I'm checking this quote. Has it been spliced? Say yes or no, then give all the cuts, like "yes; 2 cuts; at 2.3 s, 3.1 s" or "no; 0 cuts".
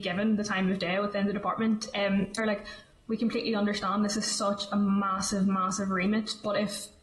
yes; 1 cut; at 2.4 s